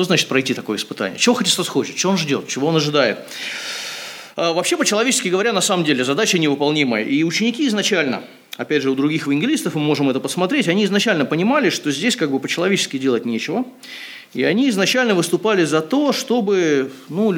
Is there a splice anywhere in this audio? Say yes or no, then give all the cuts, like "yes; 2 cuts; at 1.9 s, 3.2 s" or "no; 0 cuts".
no; 0 cuts